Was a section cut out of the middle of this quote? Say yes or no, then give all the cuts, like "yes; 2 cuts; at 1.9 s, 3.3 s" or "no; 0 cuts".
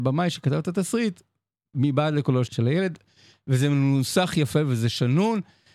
yes; 1 cut; at 2.5 s